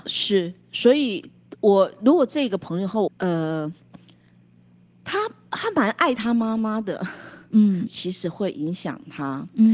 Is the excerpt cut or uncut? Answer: cut